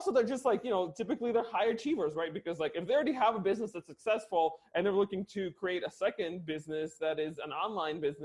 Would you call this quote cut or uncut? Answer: uncut